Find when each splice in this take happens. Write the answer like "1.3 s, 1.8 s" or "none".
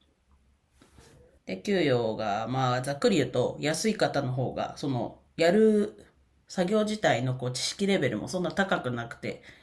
1.4 s